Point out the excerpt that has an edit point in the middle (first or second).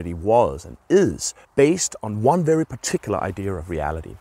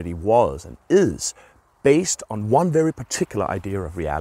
first